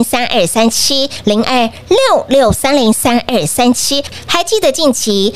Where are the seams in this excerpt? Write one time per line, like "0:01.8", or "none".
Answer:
none